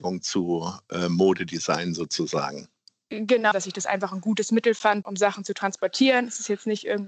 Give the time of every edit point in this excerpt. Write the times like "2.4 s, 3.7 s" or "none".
3.5 s, 5.0 s